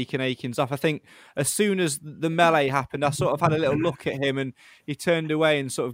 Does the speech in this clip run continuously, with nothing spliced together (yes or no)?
yes